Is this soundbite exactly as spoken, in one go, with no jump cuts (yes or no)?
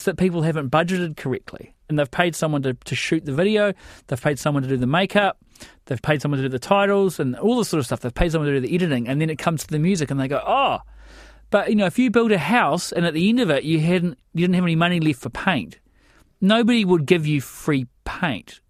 yes